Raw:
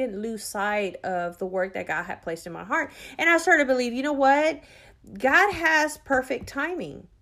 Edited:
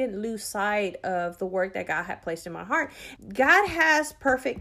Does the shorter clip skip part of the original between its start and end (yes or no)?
yes